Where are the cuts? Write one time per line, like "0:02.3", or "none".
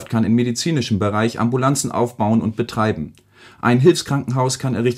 none